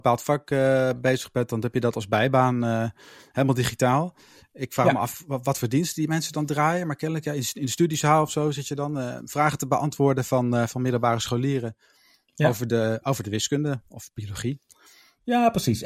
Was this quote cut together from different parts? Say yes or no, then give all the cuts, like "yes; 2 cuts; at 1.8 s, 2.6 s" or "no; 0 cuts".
no; 0 cuts